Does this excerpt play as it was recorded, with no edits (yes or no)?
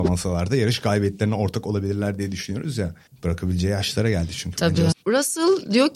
no